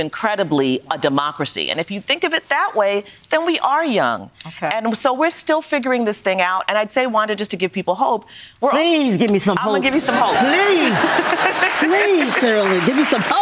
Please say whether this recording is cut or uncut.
uncut